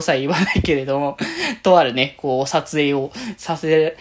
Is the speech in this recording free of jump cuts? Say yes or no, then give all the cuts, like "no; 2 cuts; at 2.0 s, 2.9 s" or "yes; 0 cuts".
yes; 0 cuts